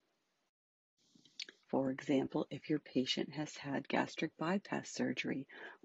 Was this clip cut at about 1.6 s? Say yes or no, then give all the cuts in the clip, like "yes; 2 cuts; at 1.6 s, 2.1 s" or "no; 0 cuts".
yes; 1 cut; at 1.6 s